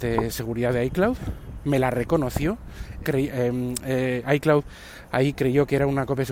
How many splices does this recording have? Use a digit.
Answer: 1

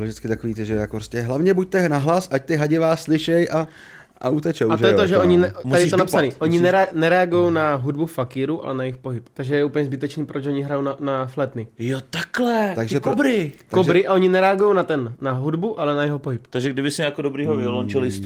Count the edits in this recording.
0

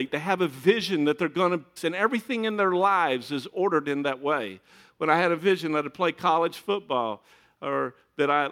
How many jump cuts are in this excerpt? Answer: 1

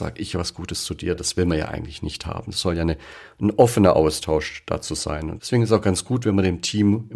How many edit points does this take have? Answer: 0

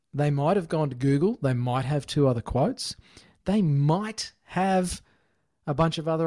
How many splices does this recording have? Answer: 0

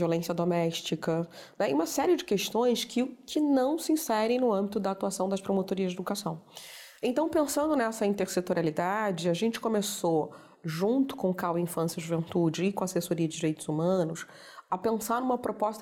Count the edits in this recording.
0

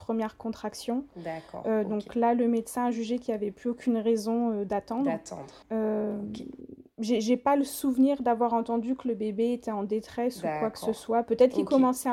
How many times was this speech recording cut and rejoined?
1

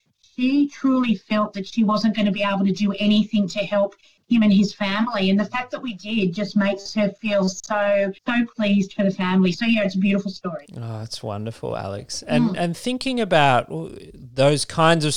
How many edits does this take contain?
1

